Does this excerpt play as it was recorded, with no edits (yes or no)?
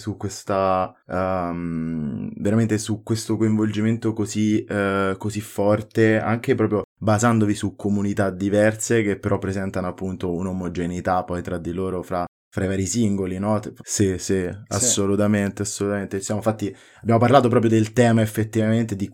no